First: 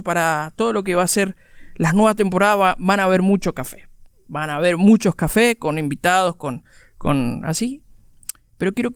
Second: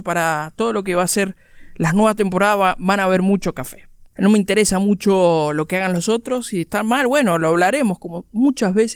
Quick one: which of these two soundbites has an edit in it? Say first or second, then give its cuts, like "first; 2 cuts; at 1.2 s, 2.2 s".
second; 1 cut; at 4.1 s